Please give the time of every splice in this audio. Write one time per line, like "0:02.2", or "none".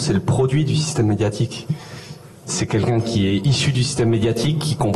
0:02.5